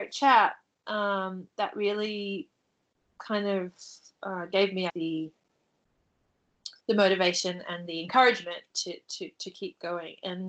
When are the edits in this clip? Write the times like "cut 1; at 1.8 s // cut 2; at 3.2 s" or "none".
cut 1; at 4.9 s // cut 2; at 6.8 s